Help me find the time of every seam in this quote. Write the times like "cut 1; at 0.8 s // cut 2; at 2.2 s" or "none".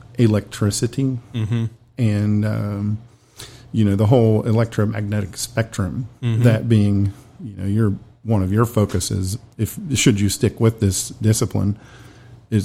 none